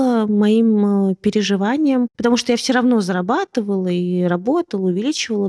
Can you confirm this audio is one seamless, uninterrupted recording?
yes; 0 cuts

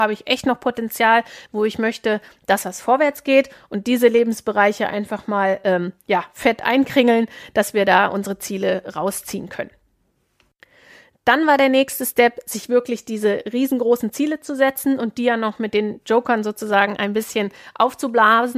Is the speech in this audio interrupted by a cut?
no; 0 cuts

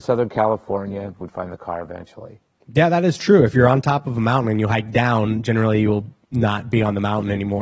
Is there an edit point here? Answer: yes; 1 cut; at 1.2 s

